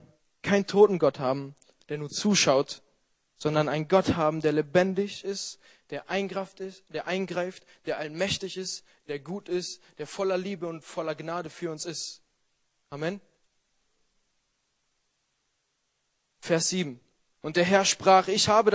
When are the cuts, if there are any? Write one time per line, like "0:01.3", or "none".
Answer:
none